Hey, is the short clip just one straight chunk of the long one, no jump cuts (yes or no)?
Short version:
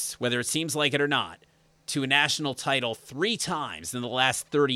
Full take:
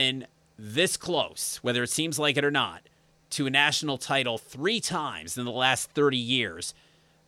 yes